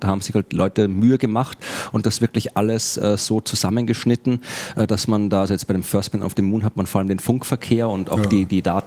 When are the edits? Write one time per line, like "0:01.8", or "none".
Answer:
none